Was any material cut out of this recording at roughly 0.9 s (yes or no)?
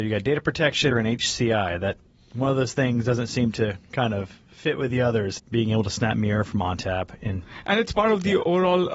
yes